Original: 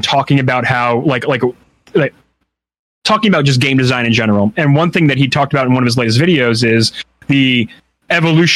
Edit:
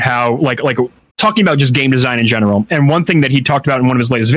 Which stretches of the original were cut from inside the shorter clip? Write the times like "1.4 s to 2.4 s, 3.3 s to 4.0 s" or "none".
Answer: 1.7 s to 3.0 s